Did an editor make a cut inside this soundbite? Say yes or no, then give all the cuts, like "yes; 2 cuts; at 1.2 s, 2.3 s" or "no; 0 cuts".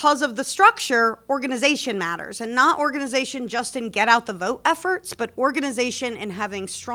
no; 0 cuts